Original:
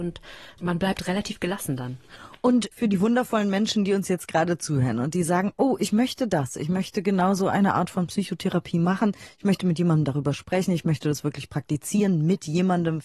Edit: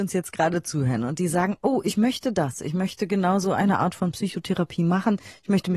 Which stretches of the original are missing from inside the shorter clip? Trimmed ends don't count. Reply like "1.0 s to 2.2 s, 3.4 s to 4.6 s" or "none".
none